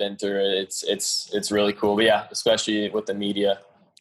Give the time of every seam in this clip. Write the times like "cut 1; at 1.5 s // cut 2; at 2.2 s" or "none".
none